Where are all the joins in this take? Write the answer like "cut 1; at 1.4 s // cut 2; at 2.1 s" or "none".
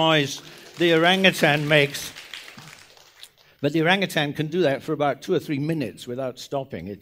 none